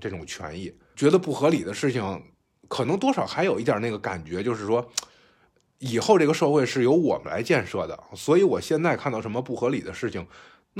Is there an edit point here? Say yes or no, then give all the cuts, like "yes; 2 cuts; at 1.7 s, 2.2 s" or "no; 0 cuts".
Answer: yes; 1 cut; at 0.9 s